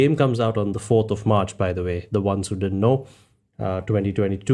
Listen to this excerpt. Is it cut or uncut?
uncut